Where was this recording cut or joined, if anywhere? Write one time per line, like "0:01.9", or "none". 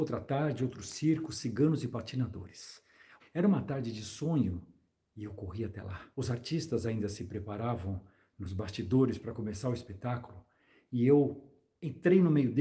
0:03.2
0:06.1